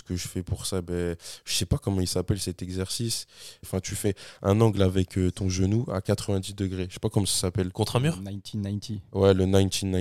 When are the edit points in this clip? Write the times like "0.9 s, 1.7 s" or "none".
3.6 s